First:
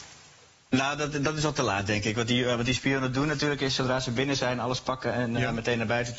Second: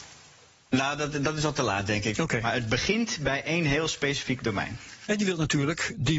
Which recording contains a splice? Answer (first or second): second